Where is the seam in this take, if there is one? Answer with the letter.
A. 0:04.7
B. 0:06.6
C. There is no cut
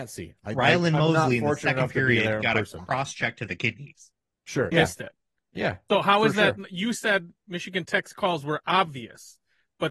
A